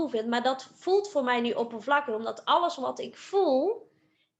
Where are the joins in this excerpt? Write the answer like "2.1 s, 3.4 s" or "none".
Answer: none